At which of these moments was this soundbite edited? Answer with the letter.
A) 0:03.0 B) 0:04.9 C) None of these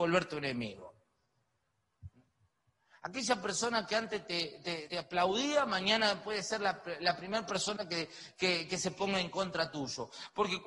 B